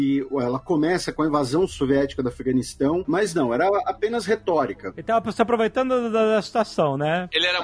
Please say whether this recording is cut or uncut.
cut